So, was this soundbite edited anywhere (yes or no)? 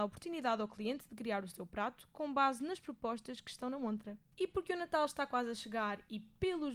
yes